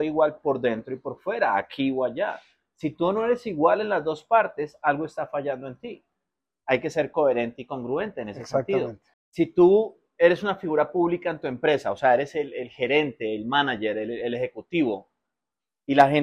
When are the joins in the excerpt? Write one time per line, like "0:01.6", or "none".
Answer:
0:09.1